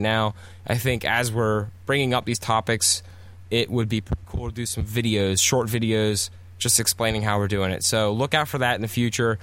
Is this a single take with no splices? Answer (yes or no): yes